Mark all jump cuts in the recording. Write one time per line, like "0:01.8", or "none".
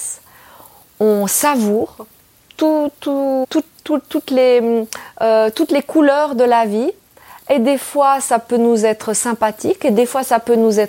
0:03.4